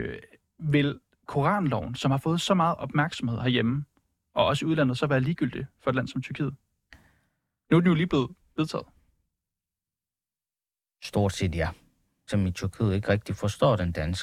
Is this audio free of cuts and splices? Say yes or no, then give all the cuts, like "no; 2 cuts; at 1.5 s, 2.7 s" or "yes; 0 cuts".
no; 1 cut; at 12.3 s